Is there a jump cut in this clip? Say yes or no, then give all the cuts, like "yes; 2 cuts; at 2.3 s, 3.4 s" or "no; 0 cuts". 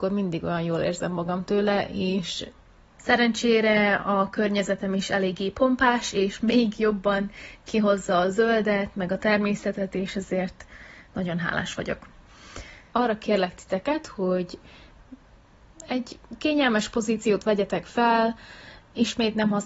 yes; 1 cut; at 12.9 s